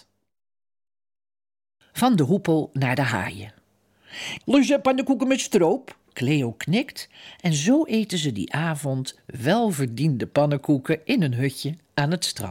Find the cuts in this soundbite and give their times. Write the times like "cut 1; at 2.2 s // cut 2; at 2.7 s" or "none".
cut 1; at 4.4 s // cut 2; at 6.0 s